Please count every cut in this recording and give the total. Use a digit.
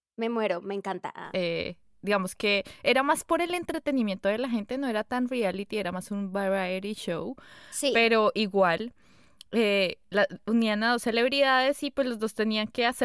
1